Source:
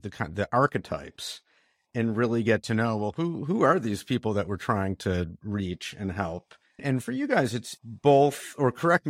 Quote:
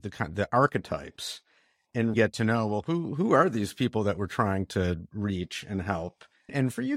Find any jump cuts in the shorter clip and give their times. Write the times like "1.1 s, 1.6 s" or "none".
2.1 s